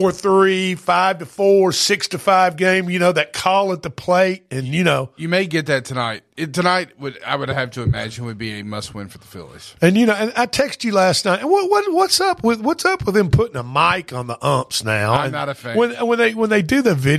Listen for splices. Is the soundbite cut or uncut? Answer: uncut